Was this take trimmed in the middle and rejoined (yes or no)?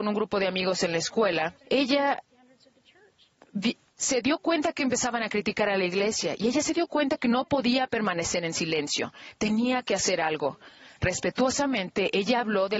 yes